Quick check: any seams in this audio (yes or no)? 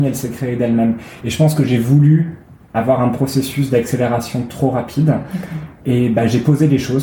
no